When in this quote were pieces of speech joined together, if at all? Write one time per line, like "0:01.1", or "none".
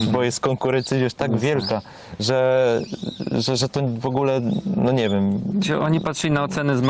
none